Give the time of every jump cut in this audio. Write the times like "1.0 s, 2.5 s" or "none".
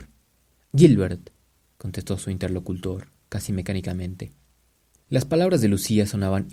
5.1 s